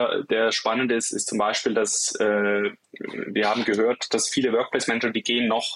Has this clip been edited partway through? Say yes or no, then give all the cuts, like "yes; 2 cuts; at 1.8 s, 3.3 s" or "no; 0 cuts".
no; 0 cuts